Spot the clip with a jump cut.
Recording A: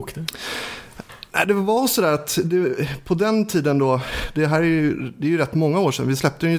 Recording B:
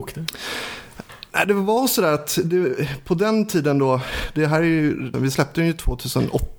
B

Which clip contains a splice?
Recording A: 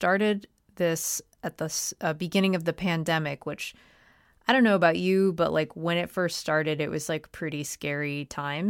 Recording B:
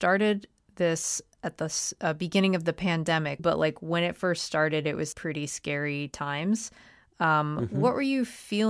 B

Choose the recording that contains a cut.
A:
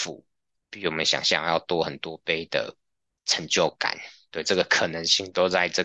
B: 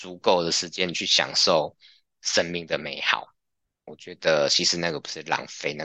B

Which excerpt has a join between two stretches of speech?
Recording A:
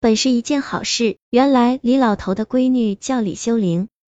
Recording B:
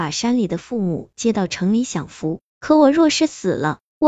A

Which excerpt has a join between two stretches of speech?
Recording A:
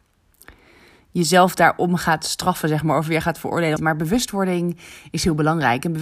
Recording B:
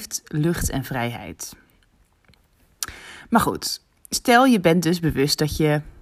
A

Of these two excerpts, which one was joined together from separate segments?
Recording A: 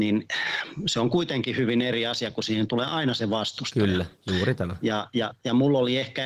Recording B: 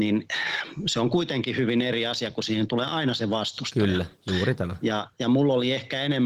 B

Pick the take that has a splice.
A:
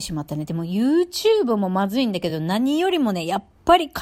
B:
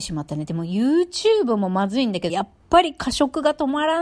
B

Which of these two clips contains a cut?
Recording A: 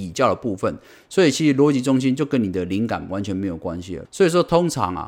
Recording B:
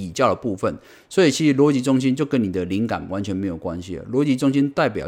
A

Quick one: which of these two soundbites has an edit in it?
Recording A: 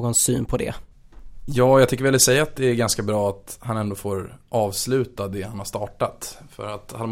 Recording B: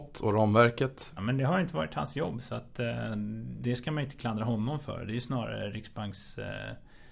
B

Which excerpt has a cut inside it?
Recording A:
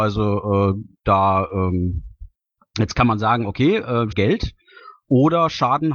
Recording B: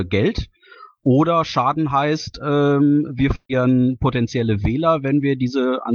A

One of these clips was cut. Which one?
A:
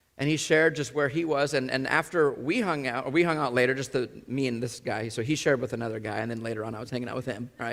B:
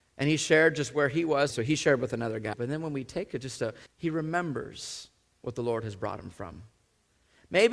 B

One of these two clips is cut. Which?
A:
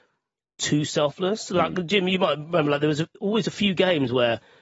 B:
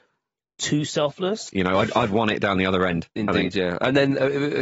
B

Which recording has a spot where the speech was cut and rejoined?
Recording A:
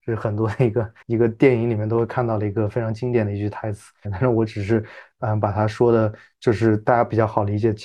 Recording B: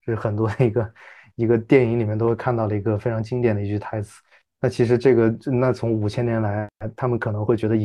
A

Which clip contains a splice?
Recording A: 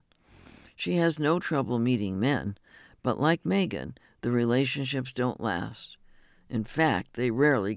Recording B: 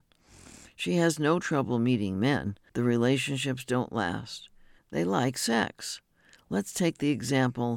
B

